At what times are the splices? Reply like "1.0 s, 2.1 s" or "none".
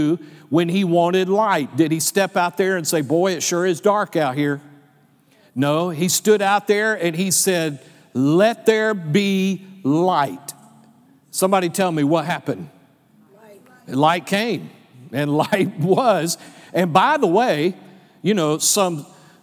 none